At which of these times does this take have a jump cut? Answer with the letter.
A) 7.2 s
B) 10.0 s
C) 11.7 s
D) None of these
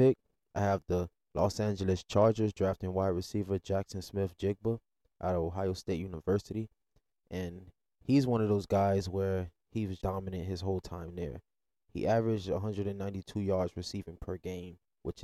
B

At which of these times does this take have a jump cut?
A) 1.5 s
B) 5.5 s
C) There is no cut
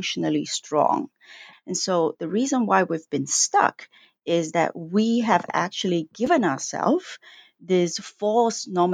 A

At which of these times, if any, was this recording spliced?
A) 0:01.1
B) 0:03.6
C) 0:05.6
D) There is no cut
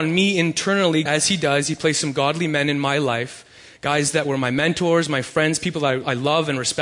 A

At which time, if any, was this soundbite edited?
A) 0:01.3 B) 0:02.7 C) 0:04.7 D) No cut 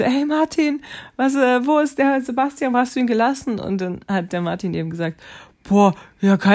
D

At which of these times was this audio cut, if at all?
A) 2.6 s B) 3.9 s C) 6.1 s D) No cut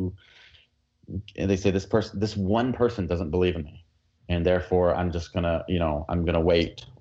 D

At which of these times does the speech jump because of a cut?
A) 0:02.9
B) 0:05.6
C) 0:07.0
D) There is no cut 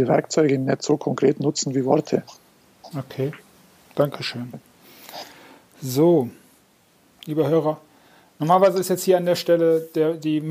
A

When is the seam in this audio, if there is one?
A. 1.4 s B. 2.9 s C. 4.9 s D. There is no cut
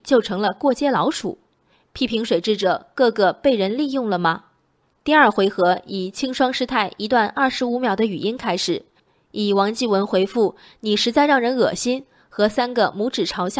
D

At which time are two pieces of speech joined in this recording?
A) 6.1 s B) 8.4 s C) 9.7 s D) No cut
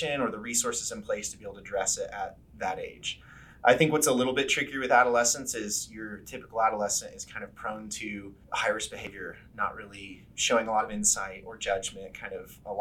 B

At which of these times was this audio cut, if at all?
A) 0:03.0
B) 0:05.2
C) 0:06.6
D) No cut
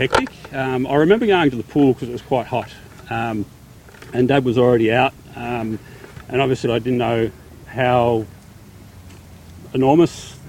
C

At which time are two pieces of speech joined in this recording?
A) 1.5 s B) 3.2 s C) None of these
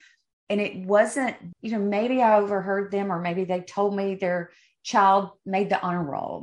A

